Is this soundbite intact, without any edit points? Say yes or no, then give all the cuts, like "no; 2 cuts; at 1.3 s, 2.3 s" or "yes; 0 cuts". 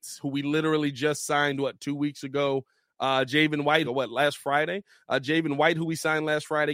no; 1 cut; at 3.8 s